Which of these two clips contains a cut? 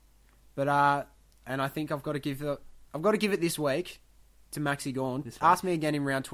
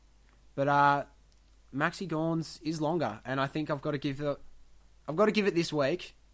first; 2 cuts; at 1.4 s, 2.9 s

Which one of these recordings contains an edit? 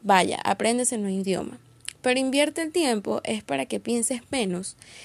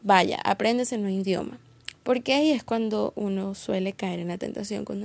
second; 1 cut; at 1.9 s

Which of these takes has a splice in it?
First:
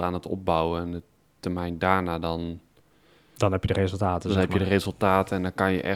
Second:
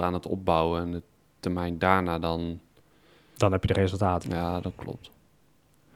second; 1 cut; at 4.2 s

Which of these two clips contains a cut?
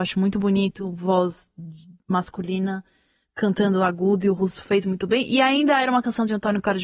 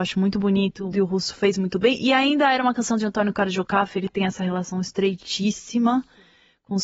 second; 1 cut; at 0.9 s

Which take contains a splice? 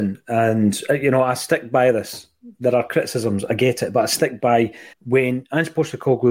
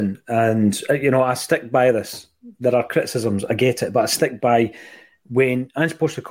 first; 1 cut; at 4.9 s

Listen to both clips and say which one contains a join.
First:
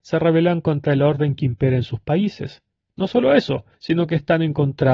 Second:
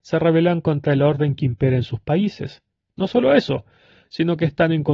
first; 1 cut; at 3.7 s

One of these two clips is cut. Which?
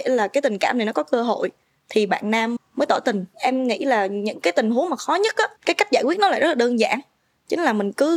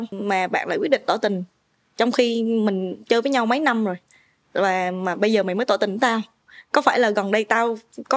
first; 2 cuts; at 2.6 s, 5.6 s

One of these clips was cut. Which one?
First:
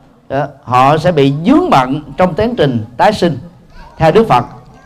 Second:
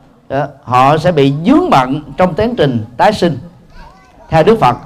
first; 1 cut; at 3.9 s

